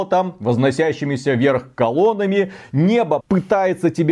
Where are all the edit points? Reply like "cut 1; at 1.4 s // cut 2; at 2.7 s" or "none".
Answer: cut 1; at 3.2 s